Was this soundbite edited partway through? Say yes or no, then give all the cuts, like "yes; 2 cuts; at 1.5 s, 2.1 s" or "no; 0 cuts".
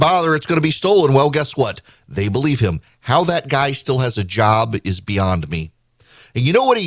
no; 0 cuts